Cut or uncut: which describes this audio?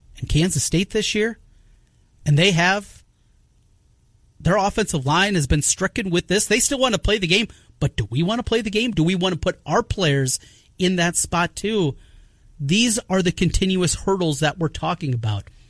uncut